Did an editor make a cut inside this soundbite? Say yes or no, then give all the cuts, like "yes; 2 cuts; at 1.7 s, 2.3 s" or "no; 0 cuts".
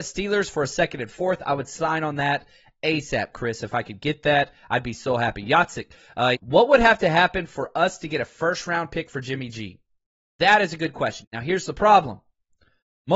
yes; 2 cuts; at 6.3 s, 11.2 s